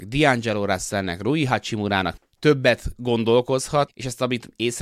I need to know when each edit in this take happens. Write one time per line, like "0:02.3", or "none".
0:02.2
0:03.9